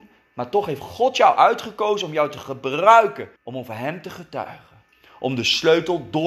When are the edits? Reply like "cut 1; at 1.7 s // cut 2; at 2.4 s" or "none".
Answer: cut 1; at 3.4 s